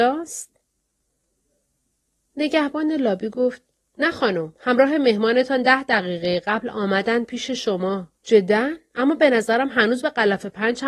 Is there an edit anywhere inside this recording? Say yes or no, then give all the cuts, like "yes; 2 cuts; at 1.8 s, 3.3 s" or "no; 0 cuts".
yes; 1 cut; at 8.2 s